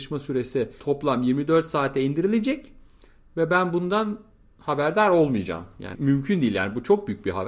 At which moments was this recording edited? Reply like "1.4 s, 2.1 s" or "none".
5.9 s